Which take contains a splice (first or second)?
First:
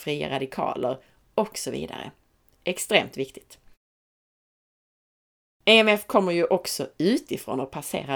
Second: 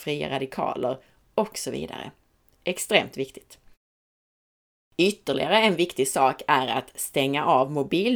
second